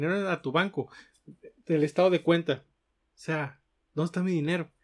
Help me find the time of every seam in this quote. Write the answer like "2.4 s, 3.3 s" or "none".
2.7 s